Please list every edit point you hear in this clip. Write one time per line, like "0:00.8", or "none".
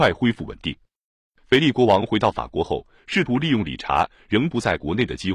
none